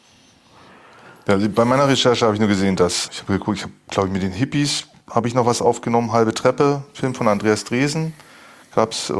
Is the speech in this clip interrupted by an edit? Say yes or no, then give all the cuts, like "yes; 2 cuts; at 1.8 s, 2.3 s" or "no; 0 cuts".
yes; 1 cut; at 3.1 s